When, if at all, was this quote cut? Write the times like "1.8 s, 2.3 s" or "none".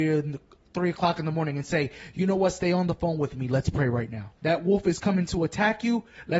4.4 s